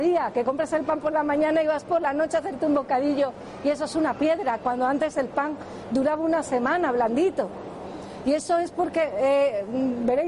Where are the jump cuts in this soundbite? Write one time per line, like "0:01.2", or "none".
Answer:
none